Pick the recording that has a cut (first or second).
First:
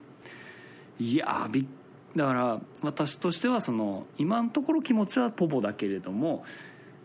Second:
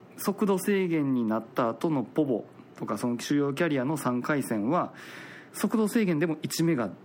second